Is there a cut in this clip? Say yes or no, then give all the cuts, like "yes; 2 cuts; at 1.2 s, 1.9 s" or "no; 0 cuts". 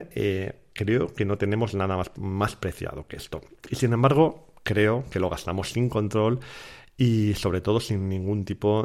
no; 0 cuts